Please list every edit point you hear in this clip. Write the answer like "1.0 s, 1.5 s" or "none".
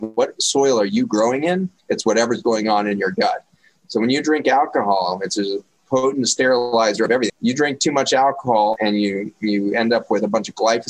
7.3 s, 8.8 s